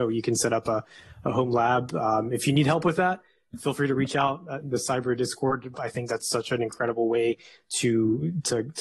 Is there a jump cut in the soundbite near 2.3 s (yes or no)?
no